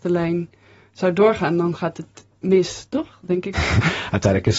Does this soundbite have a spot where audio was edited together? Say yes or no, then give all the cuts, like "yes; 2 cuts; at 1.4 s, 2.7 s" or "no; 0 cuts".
yes; 1 cut; at 3.5 s